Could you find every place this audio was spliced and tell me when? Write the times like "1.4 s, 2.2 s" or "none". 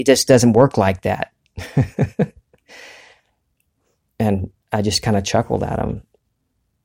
none